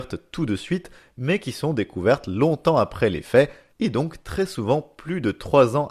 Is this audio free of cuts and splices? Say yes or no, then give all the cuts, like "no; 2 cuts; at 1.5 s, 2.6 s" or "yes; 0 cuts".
yes; 0 cuts